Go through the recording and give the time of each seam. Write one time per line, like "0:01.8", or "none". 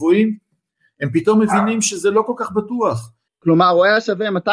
0:03.3